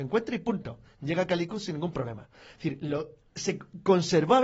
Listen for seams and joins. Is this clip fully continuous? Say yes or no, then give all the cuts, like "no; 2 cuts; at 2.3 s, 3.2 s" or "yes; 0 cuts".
yes; 0 cuts